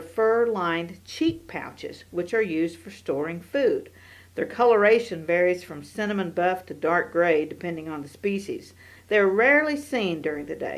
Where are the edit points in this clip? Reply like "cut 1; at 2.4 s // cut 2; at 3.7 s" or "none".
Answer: cut 1; at 9.0 s